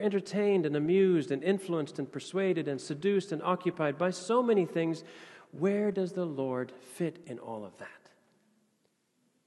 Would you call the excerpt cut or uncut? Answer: uncut